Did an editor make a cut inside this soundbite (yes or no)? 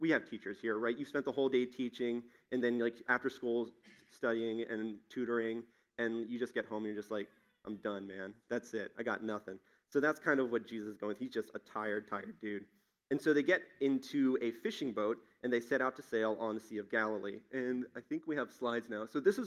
no